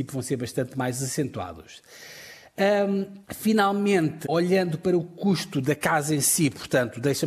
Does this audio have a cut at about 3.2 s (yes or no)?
yes